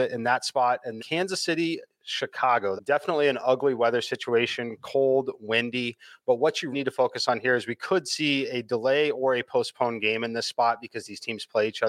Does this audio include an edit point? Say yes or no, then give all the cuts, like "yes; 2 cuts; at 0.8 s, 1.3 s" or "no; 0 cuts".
yes; 3 cuts; at 1.0 s, 2.8 s, 6.7 s